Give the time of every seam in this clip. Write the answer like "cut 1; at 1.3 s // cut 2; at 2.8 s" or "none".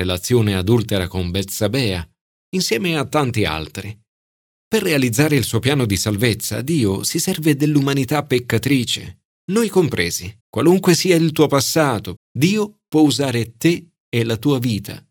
cut 1; at 10.4 s // cut 2; at 12.2 s